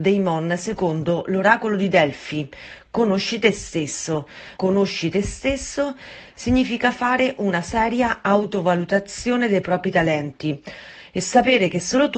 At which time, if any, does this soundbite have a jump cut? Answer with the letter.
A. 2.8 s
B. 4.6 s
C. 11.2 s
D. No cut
B